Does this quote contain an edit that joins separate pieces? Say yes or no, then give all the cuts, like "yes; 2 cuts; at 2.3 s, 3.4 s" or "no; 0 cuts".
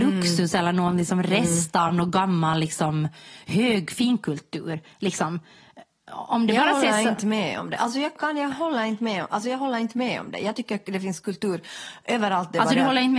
no; 0 cuts